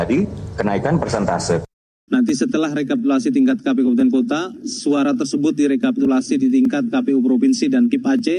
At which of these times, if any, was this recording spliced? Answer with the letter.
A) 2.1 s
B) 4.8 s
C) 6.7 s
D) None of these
A